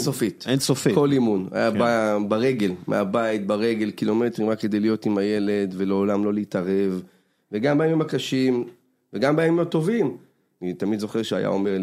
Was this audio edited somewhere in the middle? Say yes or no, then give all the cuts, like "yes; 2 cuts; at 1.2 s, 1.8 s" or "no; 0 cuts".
no; 0 cuts